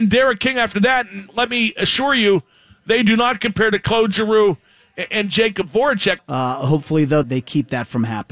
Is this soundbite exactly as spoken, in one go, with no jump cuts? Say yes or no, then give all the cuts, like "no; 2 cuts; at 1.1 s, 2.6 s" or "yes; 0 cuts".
no; 2 cuts; at 6.2 s, 7.2 s